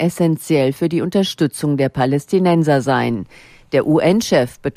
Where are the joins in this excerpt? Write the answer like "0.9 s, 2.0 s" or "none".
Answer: none